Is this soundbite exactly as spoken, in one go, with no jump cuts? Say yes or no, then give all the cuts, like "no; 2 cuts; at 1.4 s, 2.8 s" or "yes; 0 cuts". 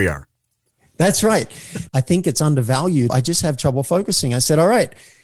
no; 2 cuts; at 1.9 s, 3.1 s